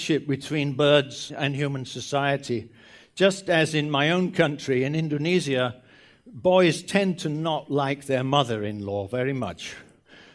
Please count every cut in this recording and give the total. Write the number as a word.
one